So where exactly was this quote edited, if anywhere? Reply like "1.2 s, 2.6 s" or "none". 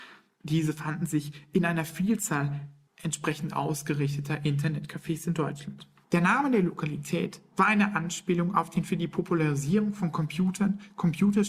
6.0 s